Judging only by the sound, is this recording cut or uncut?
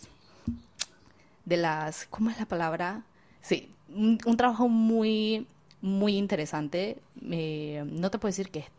cut